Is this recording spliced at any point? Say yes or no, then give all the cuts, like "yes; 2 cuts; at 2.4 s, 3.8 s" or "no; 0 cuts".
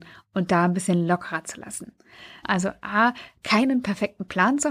yes; 1 cut; at 2.4 s